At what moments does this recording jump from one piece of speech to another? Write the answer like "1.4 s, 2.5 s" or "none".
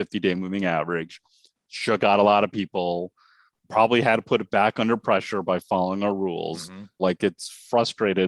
7.0 s